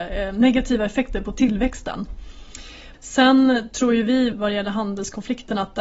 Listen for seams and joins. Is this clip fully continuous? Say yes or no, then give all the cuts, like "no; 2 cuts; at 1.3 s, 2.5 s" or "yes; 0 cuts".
no; 2 cuts; at 2.9 s, 4.3 s